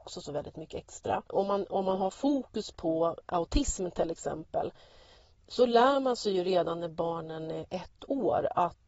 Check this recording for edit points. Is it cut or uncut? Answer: cut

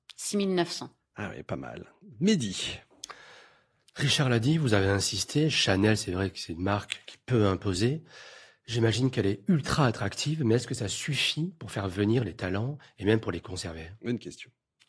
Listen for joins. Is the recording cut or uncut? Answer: uncut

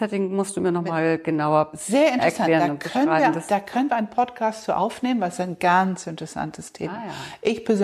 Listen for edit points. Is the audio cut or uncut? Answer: uncut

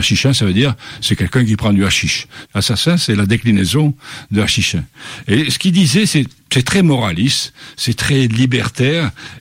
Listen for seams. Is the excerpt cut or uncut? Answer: cut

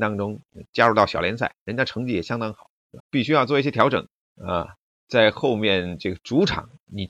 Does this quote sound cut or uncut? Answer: cut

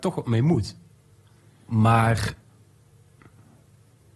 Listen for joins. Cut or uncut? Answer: cut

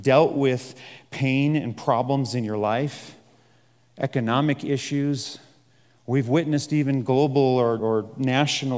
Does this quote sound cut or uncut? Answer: cut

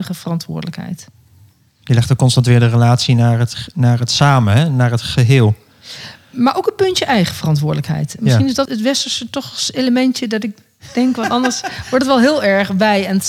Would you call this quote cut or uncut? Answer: cut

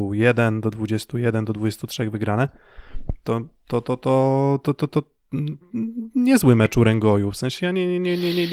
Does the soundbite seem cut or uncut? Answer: uncut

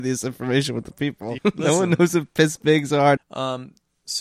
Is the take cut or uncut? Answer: cut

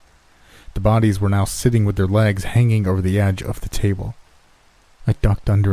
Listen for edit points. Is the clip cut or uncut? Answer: uncut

